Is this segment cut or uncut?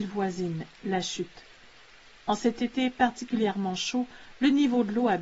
uncut